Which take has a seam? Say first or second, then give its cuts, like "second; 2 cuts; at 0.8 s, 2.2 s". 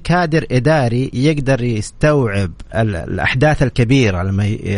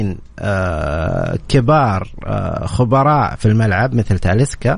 first; 1 cut; at 2.7 s